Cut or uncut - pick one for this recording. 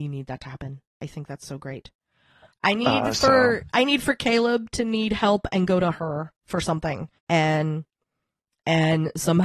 cut